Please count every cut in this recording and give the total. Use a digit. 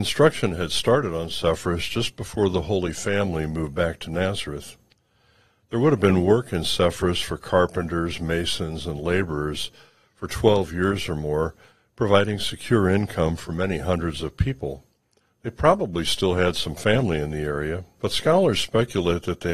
2